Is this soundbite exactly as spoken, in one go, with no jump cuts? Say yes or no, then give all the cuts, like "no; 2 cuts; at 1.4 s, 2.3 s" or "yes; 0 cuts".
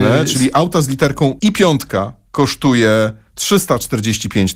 no; 1 cut; at 1.4 s